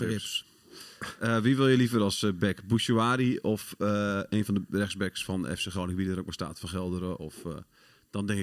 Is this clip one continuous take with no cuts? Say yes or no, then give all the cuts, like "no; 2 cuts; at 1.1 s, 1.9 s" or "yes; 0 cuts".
yes; 0 cuts